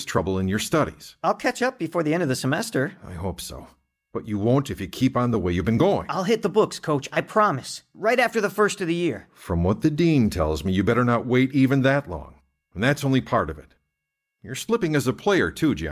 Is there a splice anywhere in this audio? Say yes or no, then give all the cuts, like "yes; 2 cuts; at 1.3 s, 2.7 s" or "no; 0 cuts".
no; 0 cuts